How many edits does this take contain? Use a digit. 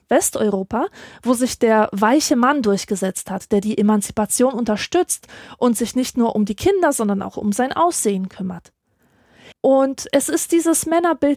1